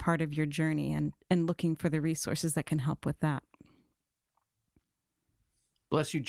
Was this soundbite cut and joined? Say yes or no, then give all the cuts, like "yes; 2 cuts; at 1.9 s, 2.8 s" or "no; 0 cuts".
no; 0 cuts